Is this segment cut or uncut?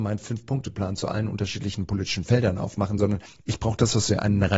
uncut